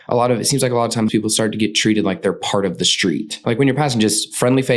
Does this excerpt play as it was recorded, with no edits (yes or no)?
no